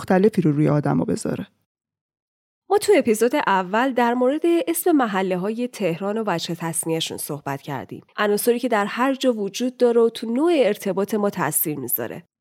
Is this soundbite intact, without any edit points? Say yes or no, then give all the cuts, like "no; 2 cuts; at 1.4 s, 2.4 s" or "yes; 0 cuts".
no; 1 cut; at 8.1 s